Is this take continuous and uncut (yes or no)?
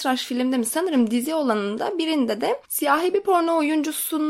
yes